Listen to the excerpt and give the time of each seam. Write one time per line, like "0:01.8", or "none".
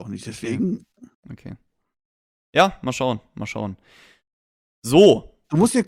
0:01.1